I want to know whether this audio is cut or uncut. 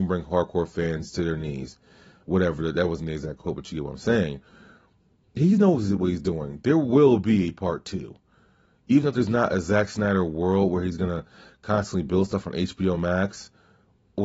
uncut